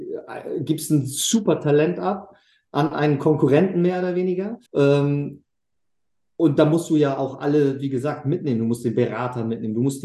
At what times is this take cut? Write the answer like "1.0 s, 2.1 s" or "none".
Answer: 4.7 s